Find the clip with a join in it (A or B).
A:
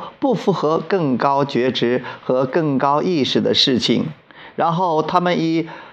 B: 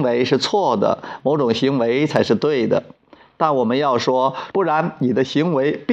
B